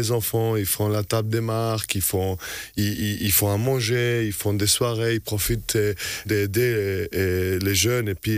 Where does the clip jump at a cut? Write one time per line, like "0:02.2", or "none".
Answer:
0:06.3